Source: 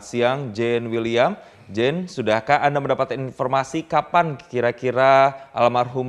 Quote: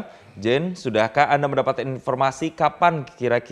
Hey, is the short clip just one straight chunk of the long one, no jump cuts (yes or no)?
yes